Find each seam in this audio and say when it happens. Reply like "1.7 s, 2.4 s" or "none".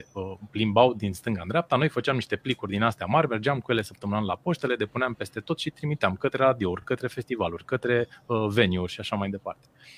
none